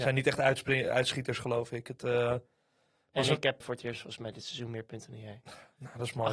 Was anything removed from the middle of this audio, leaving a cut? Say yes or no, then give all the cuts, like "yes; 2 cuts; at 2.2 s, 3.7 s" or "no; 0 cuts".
yes; 1 cut; at 3.6 s